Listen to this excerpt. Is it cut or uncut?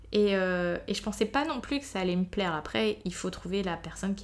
uncut